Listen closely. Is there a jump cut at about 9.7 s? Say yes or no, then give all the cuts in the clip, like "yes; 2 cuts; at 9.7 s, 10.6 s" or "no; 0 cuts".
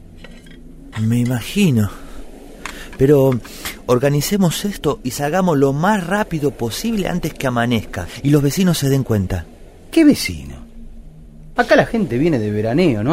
no; 2 cuts; at 0.9 s, 11.6 s